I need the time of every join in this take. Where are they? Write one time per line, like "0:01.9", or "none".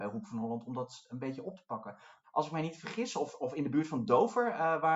0:02.2